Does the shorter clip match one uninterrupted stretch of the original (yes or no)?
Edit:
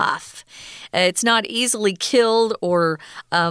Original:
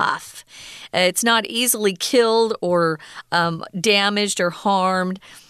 yes